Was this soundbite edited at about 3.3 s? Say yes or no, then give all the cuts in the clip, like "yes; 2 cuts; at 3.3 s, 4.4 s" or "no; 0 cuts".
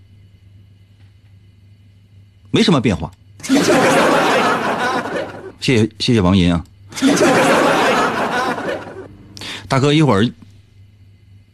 no; 1 cut; at 5.5 s